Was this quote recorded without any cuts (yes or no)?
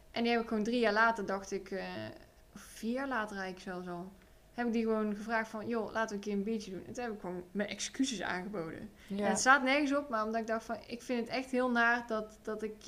yes